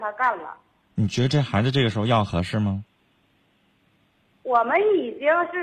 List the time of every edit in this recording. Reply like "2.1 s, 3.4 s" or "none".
none